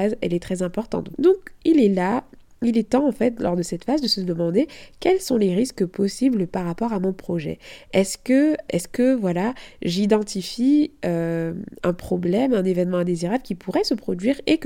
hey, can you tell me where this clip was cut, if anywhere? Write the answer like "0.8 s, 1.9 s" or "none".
1.1 s, 8.7 s